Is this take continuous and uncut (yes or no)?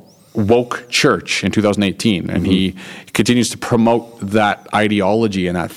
yes